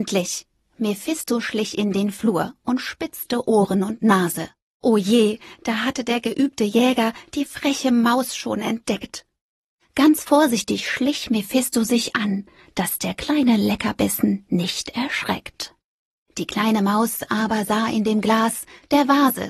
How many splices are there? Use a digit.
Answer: 1